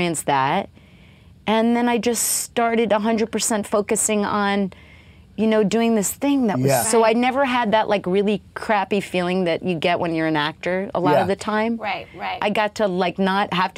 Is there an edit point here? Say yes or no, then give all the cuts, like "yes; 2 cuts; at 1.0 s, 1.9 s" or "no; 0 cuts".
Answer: yes; 1 cut; at 6.8 s